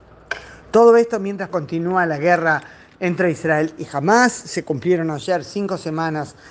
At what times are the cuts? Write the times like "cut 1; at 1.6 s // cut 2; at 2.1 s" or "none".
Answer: cut 1; at 1.5 s